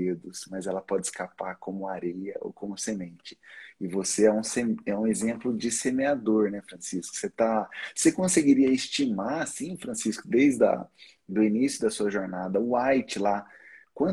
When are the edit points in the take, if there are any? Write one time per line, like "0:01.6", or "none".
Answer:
none